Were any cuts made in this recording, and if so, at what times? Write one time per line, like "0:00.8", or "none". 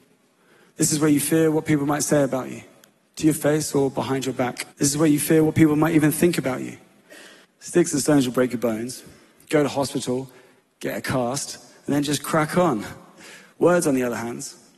0:04.7
0:07.4